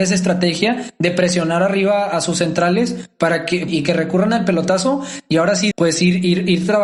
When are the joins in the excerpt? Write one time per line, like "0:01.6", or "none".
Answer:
0:03.7
0:05.7